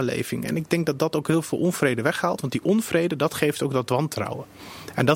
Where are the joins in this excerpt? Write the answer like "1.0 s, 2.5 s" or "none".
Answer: none

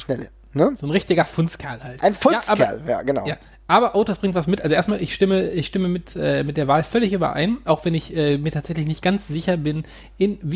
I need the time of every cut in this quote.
none

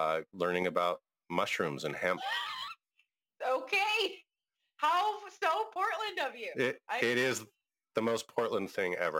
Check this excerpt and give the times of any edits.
none

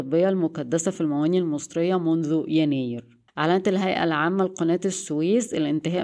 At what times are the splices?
3.3 s

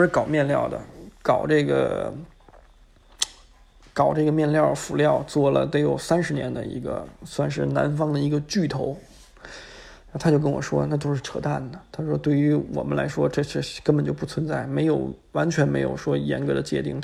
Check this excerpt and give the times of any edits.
none

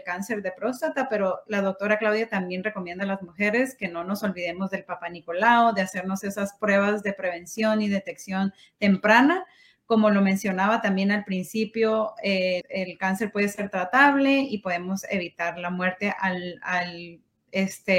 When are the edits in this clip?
12.6 s

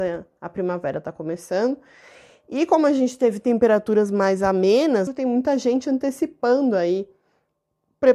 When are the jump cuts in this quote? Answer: 5.1 s

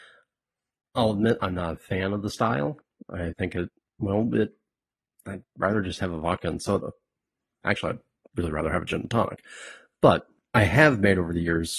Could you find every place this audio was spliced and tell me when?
none

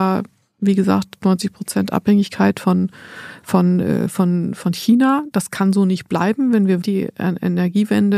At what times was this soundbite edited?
6.8 s

